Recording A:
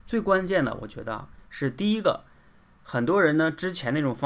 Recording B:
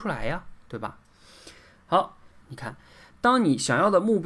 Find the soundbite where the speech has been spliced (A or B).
B